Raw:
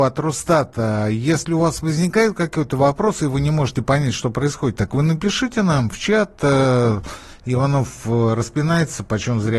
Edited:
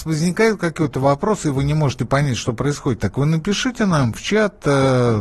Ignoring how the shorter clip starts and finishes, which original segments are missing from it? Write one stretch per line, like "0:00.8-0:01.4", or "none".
none